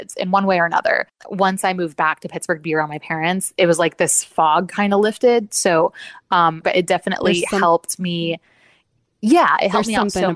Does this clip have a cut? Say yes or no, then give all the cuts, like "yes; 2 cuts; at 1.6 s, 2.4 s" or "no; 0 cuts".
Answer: yes; 1 cut; at 6.6 s